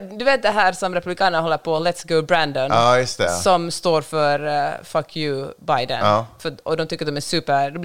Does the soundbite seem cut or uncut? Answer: uncut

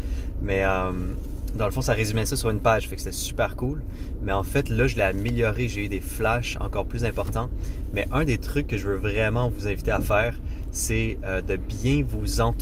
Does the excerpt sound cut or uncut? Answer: uncut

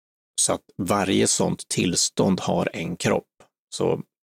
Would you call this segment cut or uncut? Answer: uncut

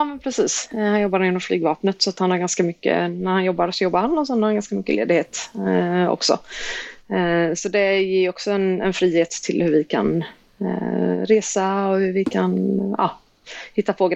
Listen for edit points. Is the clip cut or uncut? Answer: uncut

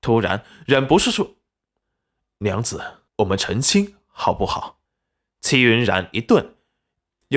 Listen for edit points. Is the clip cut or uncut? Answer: cut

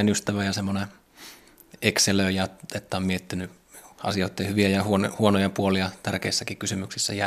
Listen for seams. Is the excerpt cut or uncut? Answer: uncut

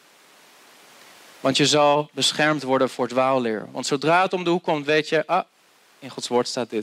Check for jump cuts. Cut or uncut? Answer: uncut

